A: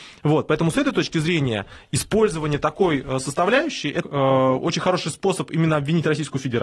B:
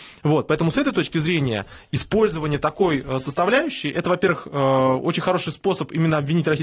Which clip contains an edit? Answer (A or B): A